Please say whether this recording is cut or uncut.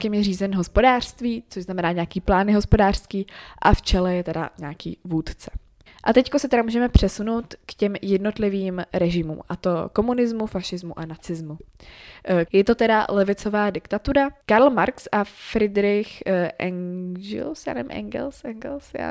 cut